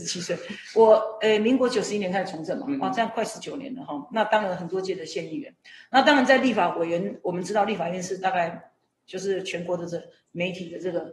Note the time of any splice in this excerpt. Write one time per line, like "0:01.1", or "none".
none